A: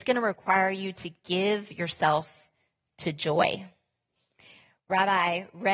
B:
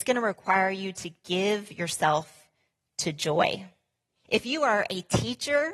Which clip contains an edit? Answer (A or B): B